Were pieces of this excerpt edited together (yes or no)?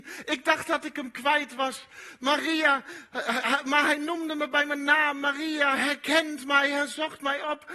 no